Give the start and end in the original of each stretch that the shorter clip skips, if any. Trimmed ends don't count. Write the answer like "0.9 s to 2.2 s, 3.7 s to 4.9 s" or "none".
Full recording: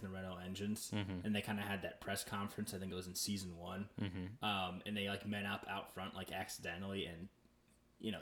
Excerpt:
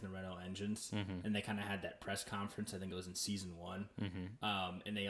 none